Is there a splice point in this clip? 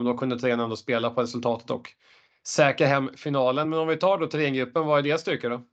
no; 0 cuts

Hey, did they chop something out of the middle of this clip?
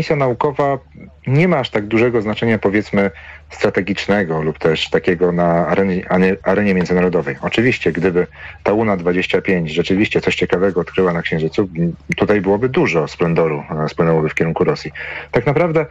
no; 0 cuts

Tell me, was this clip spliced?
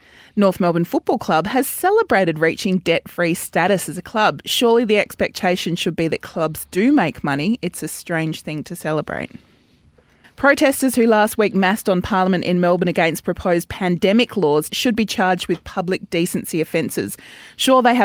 yes; 2 cuts; at 10.2 s, 14.7 s

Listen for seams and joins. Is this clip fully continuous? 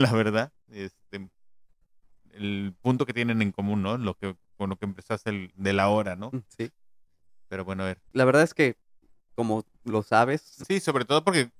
no; 3 cuts; at 5.5 s, 8.1 s, 10.6 s

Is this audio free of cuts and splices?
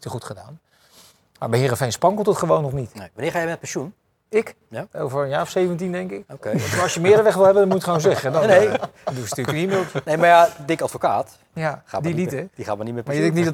yes; 0 cuts

